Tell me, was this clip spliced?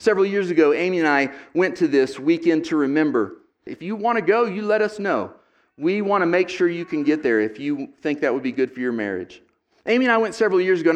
yes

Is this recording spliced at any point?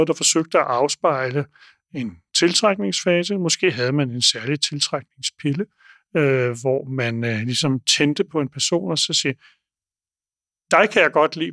no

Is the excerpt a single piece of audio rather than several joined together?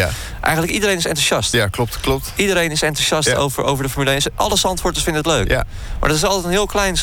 yes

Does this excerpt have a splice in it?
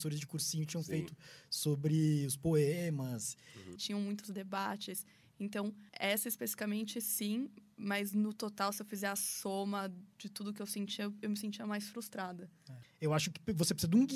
yes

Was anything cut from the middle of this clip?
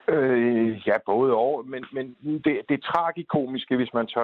no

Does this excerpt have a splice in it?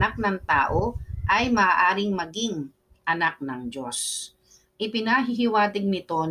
no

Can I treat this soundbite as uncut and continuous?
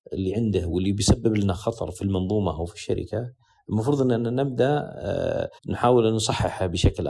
no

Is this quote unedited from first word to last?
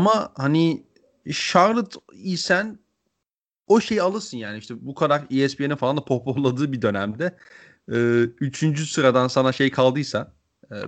yes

